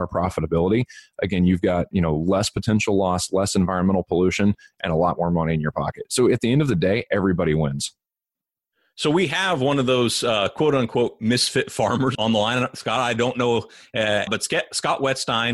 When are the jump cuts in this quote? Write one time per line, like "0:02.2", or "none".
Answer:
0:12.1
0:14.3